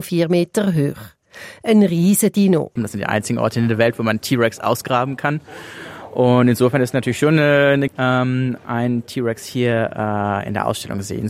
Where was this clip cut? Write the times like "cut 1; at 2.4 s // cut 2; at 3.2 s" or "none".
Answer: cut 1; at 2.8 s // cut 2; at 7.9 s